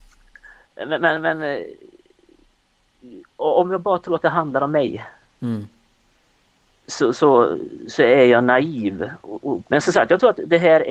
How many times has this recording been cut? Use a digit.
1